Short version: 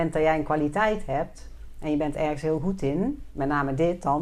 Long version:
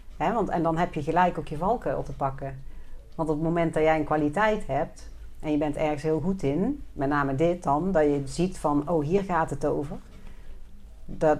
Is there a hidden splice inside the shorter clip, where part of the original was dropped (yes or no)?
no